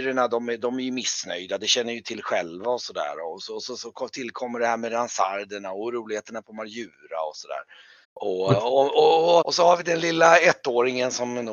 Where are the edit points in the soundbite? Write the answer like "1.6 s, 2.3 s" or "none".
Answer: 8.0 s, 9.4 s